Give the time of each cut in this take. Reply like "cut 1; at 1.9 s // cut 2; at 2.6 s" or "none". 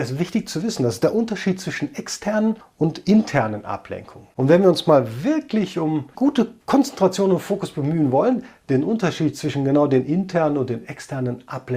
cut 1; at 6.1 s // cut 2; at 8.6 s